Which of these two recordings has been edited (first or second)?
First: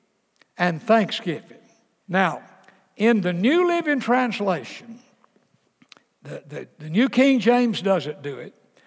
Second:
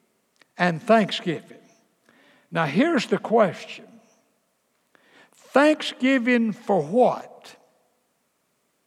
first